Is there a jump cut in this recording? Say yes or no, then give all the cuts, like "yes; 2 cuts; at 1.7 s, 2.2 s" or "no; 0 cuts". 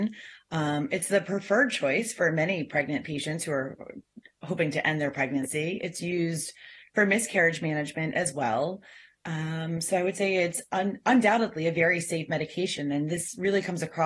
no; 0 cuts